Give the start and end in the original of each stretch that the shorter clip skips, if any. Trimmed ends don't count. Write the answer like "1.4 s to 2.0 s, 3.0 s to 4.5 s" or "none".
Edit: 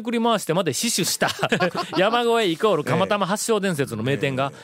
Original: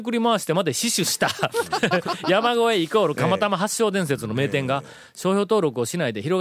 1.5 s to 1.8 s